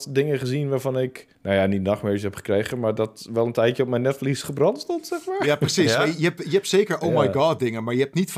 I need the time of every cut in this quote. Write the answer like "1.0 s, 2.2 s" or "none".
1.3 s